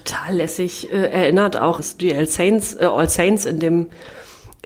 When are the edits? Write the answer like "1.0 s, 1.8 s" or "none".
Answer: 1.8 s